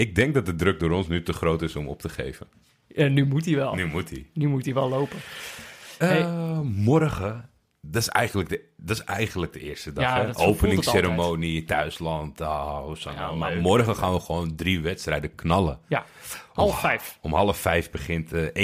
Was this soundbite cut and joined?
no; 0 cuts

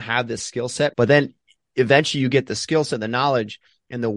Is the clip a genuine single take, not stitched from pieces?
no; 1 cut; at 0.9 s

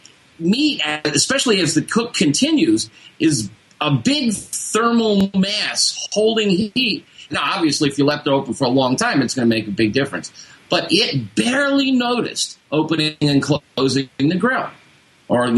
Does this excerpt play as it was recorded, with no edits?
no; 2 cuts; at 7.3 s, 12.6 s

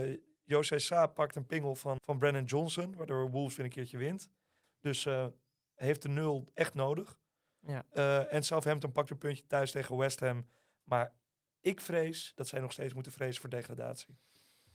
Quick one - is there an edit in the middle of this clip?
yes; 2 cuts; at 2.0 s, 4.6 s

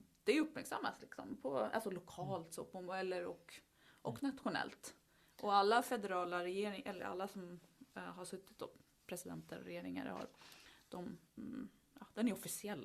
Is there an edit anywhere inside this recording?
yes; 1 cut; at 11.3 s

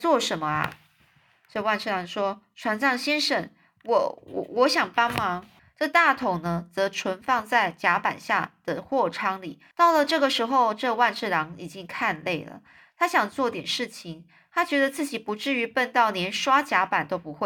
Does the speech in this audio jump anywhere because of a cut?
yes; 2 cuts; at 5.6 s, 9.7 s

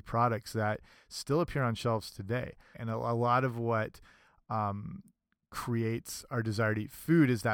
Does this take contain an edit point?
yes; 1 cut; at 2.7 s

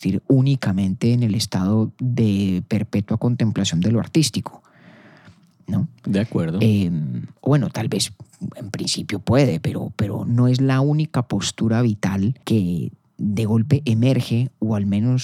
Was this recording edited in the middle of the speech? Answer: yes; 1 cut; at 12.4 s

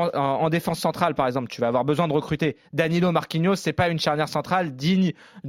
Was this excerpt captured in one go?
yes; 0 cuts

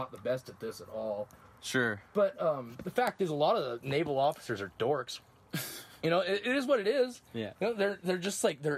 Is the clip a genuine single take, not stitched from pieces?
yes; 0 cuts

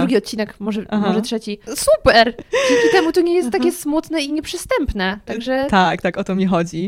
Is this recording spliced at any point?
yes; 1 cut; at 1.7 s

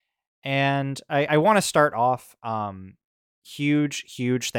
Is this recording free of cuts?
yes; 0 cuts

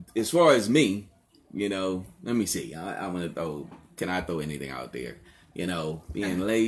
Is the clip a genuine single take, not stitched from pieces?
yes; 0 cuts

